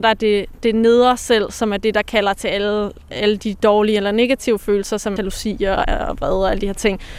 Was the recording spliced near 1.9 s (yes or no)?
no